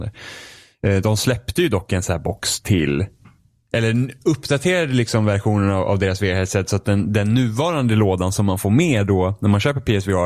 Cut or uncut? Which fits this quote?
uncut